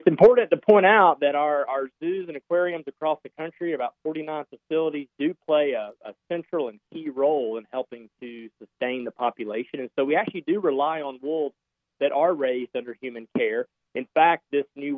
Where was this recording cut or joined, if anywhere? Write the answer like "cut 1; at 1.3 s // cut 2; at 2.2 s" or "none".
none